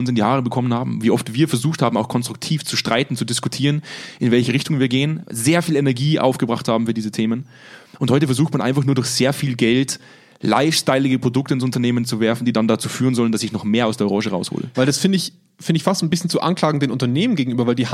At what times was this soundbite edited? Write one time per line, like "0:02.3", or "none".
0:14.7